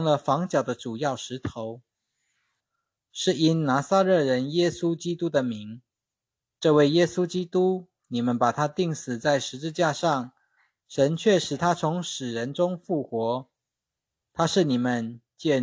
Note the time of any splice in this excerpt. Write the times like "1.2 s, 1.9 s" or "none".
2.6 s